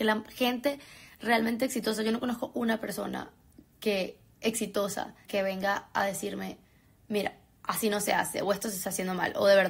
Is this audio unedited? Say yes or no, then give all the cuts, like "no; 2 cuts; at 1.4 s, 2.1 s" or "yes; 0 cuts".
no; 1 cut; at 5.2 s